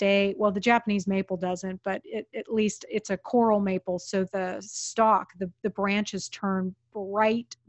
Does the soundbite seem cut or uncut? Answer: uncut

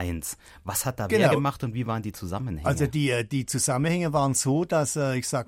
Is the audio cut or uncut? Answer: uncut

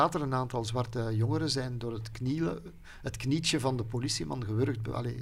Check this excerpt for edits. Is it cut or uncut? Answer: uncut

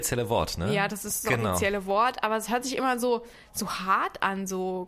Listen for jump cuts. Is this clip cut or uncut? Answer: uncut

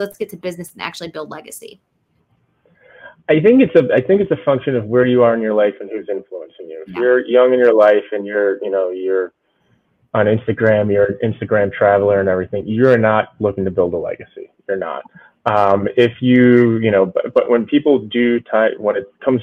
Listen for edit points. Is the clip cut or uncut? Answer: uncut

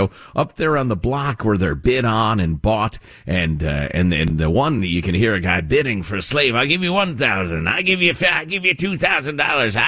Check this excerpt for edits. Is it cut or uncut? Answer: uncut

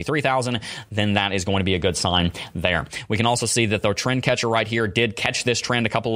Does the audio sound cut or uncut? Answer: uncut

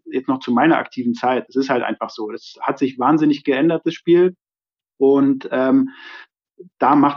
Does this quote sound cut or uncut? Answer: uncut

